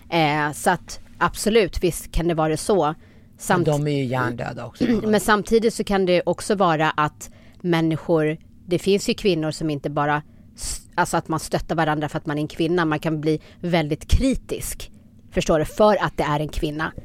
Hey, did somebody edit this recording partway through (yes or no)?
no